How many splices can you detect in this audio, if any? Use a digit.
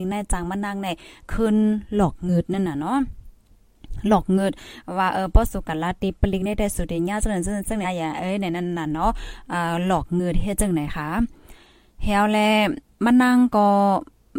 1